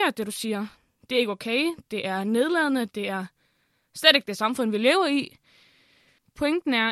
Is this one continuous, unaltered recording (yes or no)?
yes